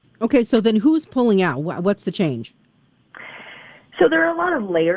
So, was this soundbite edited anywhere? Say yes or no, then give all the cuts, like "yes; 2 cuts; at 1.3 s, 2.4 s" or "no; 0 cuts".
no; 0 cuts